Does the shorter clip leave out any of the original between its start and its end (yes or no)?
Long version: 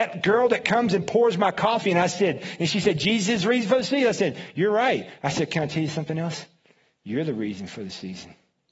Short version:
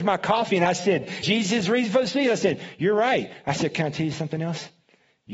yes